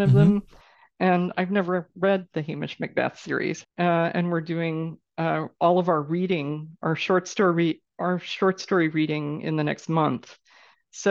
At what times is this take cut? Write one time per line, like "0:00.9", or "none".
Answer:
0:03.6